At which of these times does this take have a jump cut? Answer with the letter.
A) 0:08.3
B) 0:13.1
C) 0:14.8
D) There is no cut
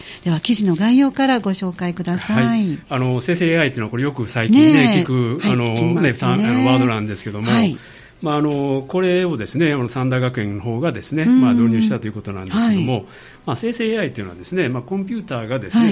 D